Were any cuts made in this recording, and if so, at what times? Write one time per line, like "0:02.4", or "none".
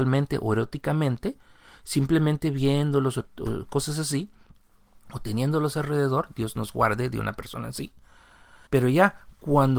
0:08.7